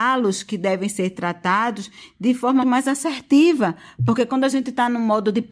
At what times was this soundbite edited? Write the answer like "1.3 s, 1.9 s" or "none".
2.6 s